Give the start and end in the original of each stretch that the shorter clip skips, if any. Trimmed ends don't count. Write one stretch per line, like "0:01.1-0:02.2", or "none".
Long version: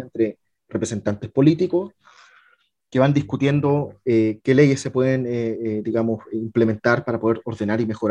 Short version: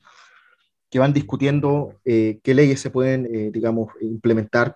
0:05.3-0:05.6